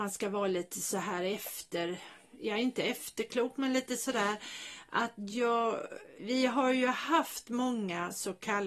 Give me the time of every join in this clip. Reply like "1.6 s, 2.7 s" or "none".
6.2 s